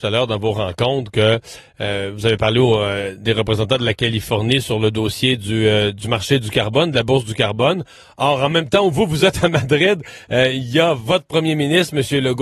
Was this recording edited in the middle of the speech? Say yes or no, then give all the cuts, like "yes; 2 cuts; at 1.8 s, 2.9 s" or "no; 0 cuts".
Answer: no; 0 cuts